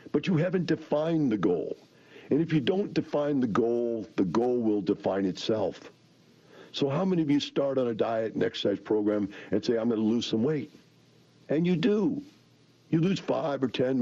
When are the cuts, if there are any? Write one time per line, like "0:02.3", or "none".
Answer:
none